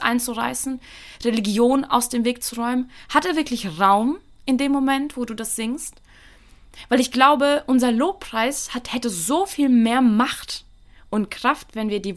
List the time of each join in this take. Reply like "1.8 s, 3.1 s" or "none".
none